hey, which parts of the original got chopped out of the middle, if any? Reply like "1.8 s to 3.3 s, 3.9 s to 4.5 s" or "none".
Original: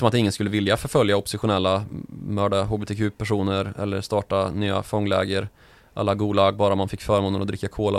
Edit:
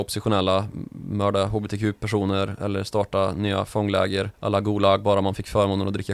5.5 s to 5.9 s